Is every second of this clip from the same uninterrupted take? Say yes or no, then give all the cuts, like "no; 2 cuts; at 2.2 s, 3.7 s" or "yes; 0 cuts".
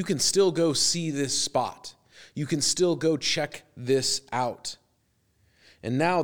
yes; 0 cuts